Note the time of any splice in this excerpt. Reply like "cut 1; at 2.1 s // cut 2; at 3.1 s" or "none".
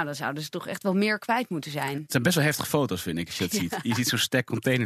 none

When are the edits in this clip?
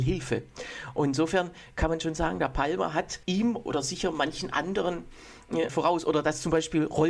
cut 1; at 3.2 s // cut 2; at 5.7 s

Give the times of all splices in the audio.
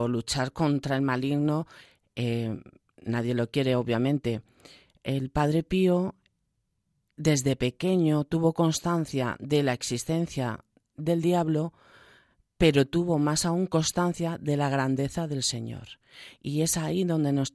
none

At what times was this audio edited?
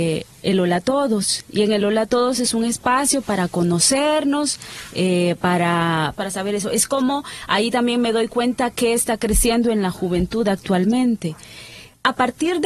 cut 1; at 6.1 s

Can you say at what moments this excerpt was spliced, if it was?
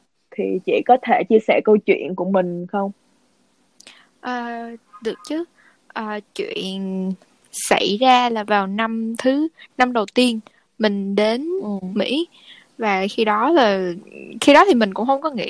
none

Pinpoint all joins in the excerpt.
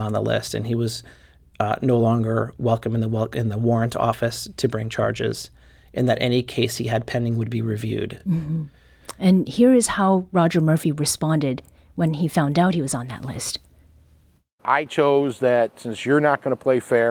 none

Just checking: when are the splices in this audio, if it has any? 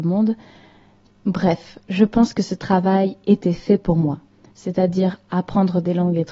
cut 1; at 1.1 s // cut 2; at 4.4 s

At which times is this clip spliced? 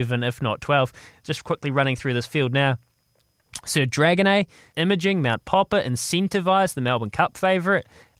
cut 1; at 4.7 s

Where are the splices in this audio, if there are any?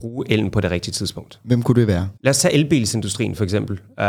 cut 1; at 2.2 s

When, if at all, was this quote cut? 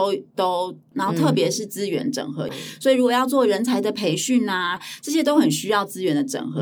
cut 1; at 0.9 s // cut 2; at 2.5 s // cut 3; at 4.8 s

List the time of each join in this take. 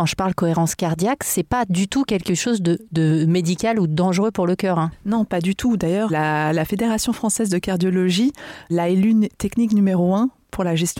cut 1; at 6.1 s // cut 2; at 8.7 s

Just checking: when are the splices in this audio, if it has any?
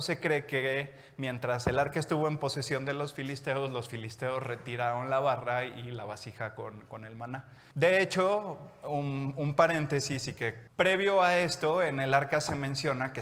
cut 1; at 7.7 s // cut 2; at 10.7 s

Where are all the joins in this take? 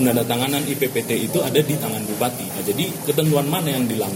none

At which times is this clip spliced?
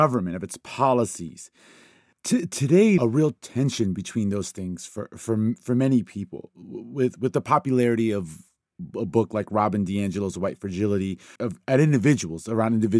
cut 1; at 3.0 s // cut 2; at 11.4 s

